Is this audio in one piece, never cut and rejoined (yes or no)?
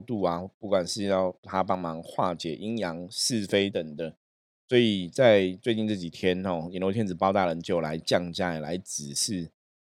no